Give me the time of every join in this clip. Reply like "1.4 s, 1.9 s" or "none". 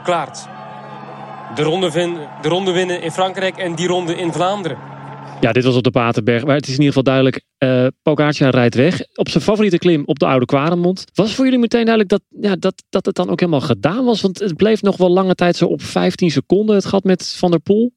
11.1 s